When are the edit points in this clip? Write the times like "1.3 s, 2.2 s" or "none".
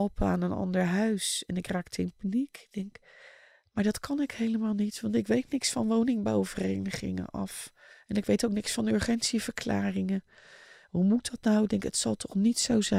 none